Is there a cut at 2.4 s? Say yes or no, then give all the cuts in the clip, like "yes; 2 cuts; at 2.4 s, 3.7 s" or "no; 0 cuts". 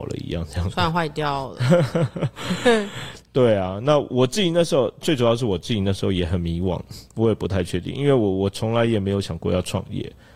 no; 0 cuts